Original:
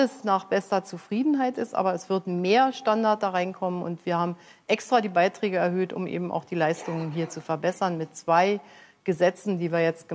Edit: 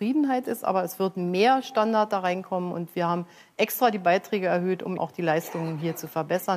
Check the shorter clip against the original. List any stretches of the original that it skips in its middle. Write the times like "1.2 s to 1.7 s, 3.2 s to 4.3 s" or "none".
6.1 s to 6.3 s